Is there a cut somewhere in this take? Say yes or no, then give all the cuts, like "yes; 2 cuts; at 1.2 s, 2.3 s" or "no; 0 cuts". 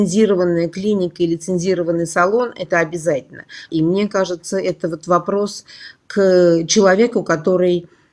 yes; 1 cut; at 3.7 s